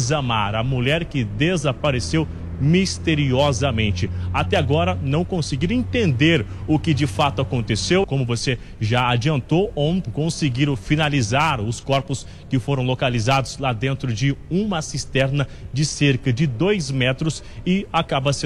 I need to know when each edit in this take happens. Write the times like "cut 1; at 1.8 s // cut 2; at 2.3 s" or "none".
cut 1; at 8.0 s // cut 2; at 10.0 s